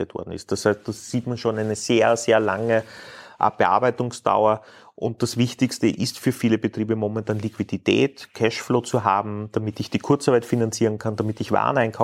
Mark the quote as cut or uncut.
uncut